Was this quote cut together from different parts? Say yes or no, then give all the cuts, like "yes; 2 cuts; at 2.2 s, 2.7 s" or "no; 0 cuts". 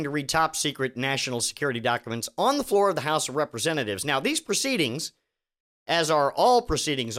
no; 0 cuts